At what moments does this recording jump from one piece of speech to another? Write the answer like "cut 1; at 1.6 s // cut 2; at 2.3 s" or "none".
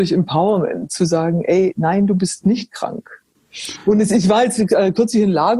none